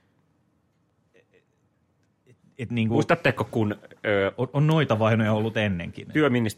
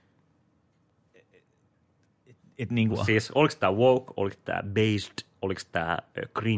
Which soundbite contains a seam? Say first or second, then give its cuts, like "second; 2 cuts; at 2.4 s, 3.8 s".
second; 2 cuts; at 2.9 s, 4.1 s